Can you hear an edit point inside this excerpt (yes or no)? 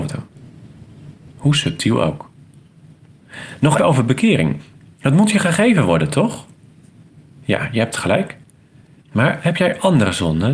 yes